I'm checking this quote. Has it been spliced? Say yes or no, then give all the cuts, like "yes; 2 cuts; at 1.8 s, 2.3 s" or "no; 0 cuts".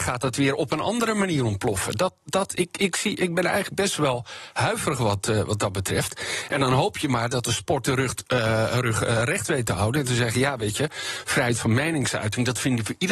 no; 0 cuts